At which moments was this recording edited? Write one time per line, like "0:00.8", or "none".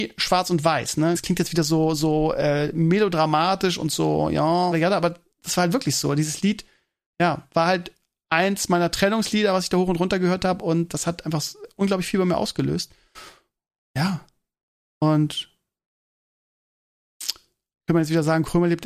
0:01.1
0:04.7